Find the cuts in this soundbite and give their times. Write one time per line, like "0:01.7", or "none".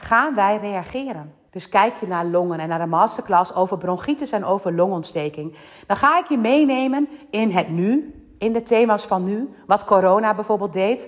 0:01.5